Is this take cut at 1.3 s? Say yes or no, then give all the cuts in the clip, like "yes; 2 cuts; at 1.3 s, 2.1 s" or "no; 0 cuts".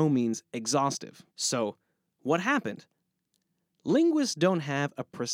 yes; 1 cut; at 1.3 s